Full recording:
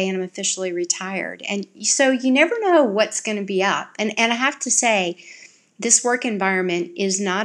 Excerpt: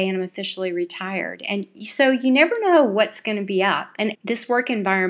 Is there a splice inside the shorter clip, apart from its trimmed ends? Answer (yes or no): yes